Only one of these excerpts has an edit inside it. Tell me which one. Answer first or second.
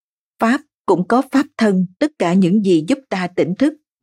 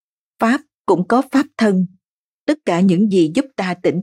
first